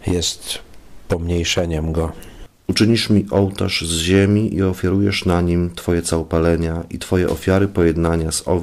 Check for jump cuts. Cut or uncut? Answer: uncut